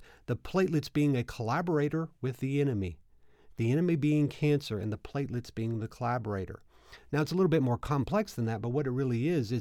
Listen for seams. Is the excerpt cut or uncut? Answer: uncut